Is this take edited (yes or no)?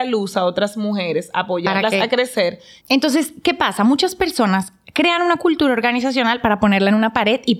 yes